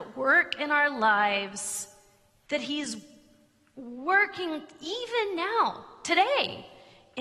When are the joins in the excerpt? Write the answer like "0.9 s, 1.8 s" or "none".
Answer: 2.5 s